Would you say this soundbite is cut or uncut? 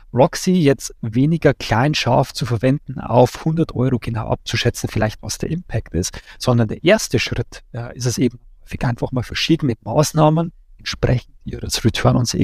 uncut